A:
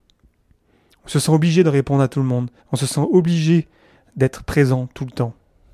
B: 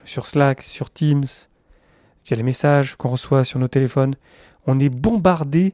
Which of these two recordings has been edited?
A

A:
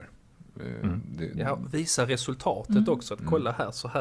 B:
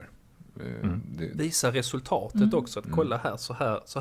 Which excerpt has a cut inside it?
B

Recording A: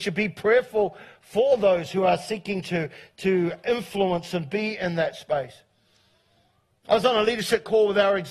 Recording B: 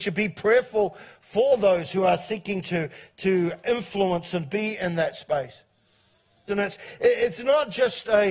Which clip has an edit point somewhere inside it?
B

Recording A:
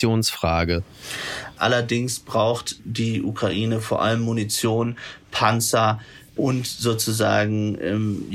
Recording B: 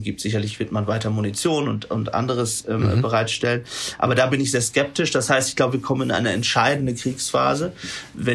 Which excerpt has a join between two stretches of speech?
A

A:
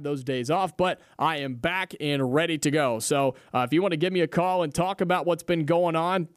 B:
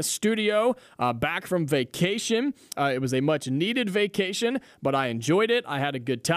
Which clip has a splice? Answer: B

